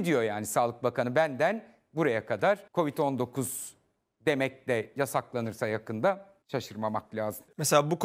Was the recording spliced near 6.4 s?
yes; 2 cuts; at 2.7 s, 6.4 s

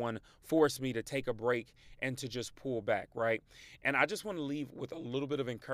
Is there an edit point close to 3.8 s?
no; 0 cuts

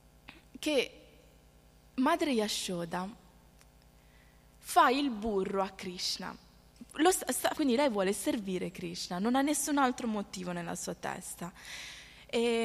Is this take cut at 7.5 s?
yes; 1 cut; at 7.5 s

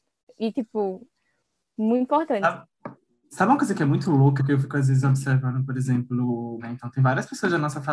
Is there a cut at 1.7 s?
no; 2 cuts; at 4.4 s, 6.6 s

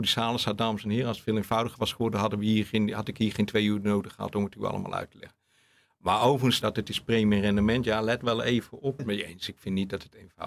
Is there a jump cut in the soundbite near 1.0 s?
no; 2 cuts; at 6.6 s, 9.0 s

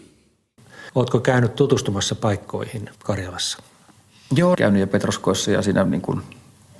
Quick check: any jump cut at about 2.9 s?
yes; 2 cuts; at 2.9 s, 4.5 s

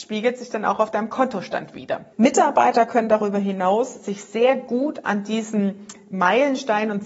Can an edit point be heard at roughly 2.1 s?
yes; 1 cut; at 2.1 s

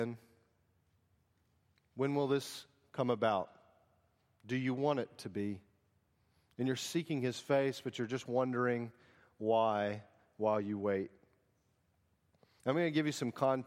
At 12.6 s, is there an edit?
yes; 1 cut; at 12.6 s

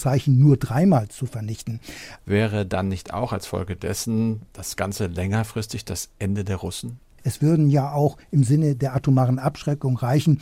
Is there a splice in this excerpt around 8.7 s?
no; 2 cuts; at 2.2 s, 7.2 s

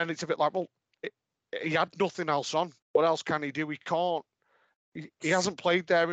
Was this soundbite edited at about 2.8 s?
yes; 1 cut; at 2.8 s

